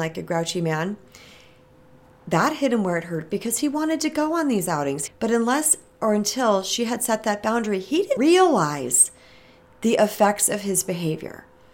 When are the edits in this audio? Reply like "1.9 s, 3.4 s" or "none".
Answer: 5.1 s, 8.2 s